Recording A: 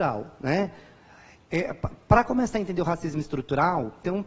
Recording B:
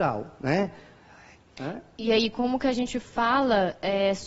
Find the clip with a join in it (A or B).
B